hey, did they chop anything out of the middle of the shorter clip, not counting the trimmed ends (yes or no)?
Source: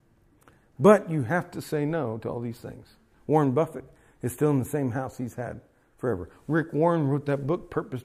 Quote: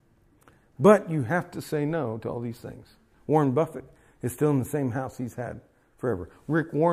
no